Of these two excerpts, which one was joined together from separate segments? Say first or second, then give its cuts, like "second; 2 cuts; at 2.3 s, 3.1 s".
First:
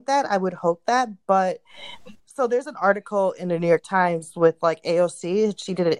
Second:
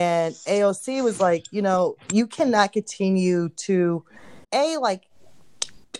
second; 1 cut; at 4.4 s